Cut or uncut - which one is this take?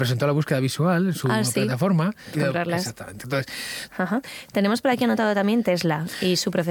cut